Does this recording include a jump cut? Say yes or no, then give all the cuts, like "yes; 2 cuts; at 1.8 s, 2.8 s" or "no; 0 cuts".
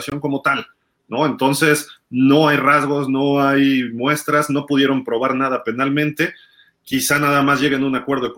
no; 0 cuts